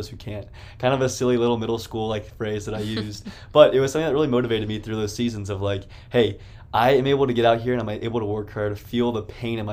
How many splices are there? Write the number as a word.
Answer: zero